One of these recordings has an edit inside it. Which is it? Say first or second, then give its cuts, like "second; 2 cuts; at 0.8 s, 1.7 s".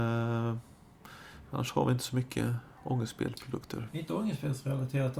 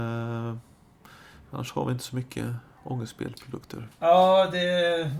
second; 1 cut; at 3.9 s